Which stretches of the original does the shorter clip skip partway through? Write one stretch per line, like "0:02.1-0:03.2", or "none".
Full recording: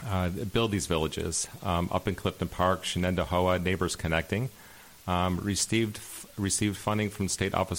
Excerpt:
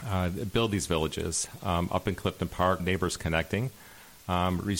0:02.8-0:03.6

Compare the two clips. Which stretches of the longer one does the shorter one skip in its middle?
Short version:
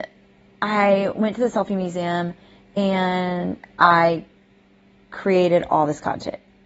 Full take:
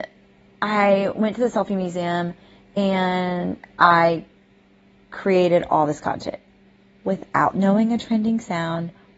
none

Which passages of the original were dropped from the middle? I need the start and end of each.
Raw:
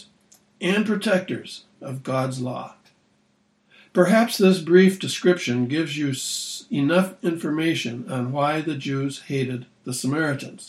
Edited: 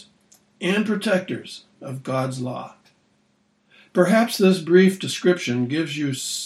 none

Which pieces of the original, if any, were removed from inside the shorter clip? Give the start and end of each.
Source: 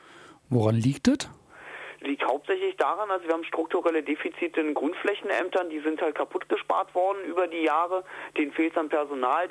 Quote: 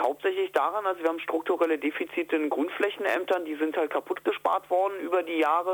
none

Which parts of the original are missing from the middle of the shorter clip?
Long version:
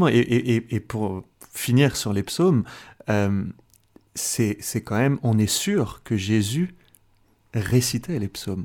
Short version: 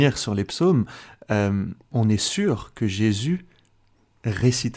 0:03.7-0:05.2

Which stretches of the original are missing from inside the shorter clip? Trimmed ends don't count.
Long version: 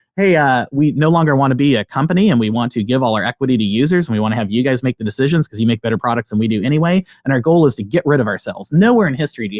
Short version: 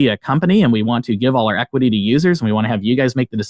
none

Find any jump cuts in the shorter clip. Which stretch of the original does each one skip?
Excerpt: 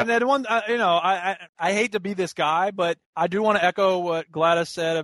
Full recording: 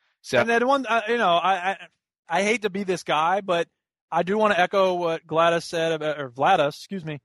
0:01.9-0:02.2
0:03.8-0:04.0

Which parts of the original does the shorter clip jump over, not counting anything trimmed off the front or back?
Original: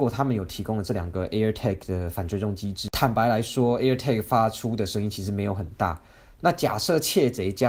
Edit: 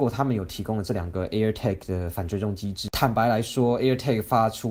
none

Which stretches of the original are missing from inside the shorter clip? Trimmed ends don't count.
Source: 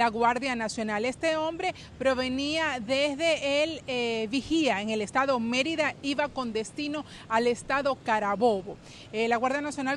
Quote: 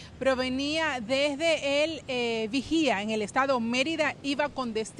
none

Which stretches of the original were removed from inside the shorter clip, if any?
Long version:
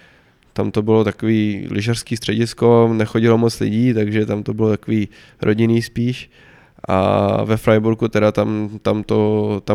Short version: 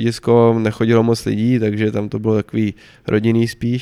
none

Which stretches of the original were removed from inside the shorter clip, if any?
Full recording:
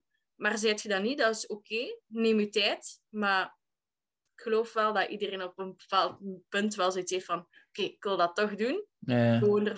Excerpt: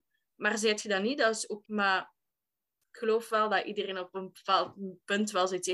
0:01.7-0:03.1

